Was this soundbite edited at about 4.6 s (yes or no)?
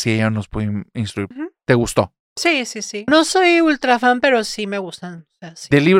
no